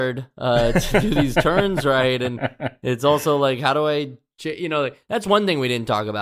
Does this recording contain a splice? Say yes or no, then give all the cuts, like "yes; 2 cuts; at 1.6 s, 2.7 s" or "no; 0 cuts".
no; 0 cuts